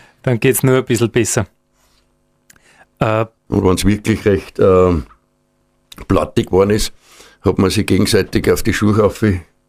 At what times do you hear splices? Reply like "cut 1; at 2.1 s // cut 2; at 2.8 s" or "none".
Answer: cut 1; at 3.5 s